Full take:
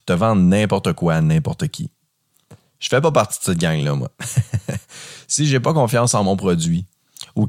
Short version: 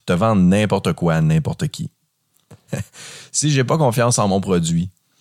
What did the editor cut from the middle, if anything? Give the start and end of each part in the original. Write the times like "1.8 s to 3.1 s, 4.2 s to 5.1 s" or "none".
2.7 s to 4.6 s